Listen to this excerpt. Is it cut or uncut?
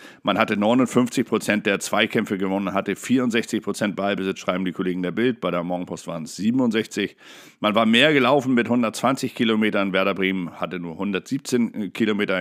uncut